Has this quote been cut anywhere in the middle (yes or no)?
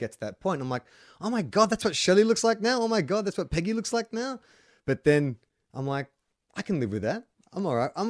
yes